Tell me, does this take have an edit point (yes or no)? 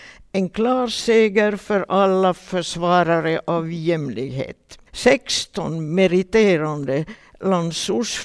yes